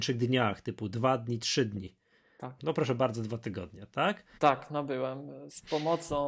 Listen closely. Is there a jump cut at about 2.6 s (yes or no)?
yes